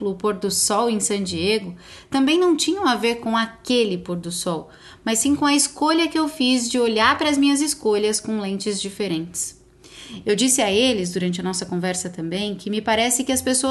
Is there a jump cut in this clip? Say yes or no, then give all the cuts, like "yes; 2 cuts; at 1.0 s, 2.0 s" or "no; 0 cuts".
yes; 1 cut; at 10.2 s